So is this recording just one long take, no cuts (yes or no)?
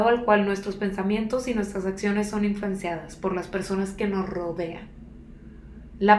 yes